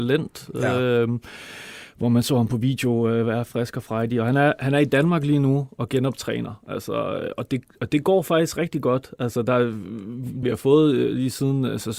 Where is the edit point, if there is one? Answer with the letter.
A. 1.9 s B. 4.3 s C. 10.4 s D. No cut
C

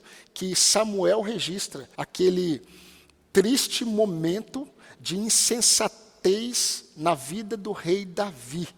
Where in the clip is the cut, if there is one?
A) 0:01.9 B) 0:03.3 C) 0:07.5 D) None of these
A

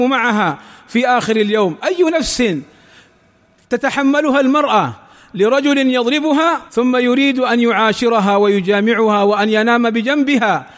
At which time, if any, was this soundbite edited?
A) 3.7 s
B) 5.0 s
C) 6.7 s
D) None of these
C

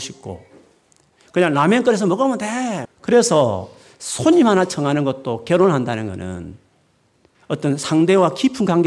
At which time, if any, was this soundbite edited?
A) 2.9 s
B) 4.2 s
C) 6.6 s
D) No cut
A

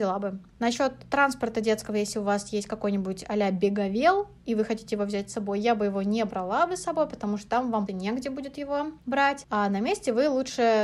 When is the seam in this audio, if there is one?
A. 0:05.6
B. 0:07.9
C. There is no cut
B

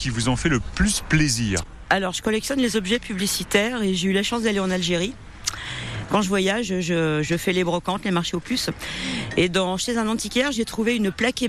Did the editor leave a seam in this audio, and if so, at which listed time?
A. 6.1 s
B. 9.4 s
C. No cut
A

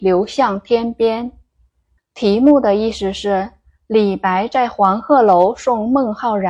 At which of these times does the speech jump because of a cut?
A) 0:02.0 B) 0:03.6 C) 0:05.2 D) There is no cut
A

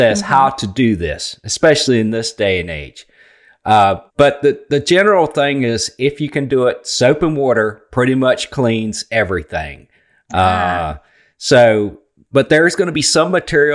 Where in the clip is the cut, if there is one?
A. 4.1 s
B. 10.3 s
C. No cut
A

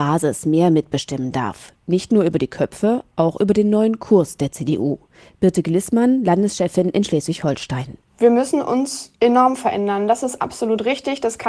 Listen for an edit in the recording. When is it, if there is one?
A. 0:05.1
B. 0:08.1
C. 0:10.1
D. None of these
D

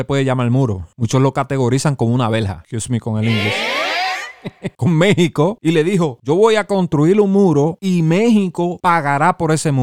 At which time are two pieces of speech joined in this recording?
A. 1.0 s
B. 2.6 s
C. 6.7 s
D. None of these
B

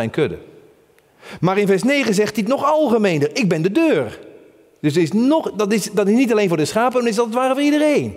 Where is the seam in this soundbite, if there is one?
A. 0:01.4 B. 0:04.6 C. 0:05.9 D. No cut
D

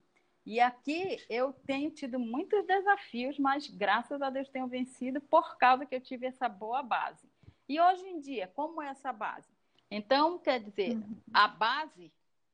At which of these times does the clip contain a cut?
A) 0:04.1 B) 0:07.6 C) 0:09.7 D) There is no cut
C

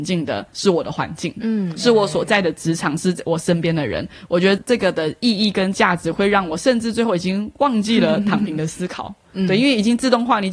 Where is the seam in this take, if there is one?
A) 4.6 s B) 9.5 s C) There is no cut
A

